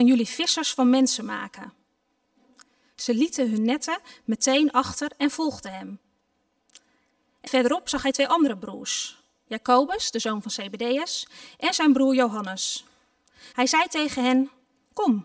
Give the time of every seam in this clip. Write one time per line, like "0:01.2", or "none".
0:07.5
0:13.5